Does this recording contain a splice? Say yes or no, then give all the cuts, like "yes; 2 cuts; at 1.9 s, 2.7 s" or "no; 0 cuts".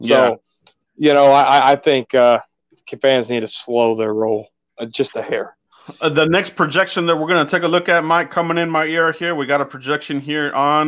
no; 0 cuts